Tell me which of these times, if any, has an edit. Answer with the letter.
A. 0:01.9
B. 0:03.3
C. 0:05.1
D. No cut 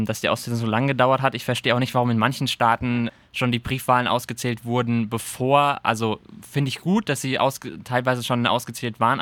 D